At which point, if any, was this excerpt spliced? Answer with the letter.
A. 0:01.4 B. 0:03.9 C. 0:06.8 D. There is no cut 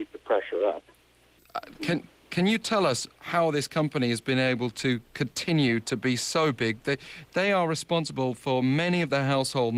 A